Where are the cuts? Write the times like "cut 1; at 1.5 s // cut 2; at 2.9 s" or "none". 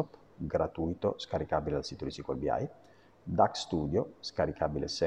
cut 1; at 4.1 s